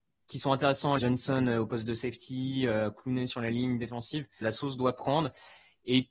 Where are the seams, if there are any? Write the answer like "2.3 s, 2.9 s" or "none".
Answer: 1.0 s, 4.4 s